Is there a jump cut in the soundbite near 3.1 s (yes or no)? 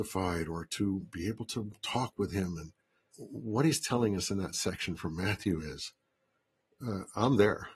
yes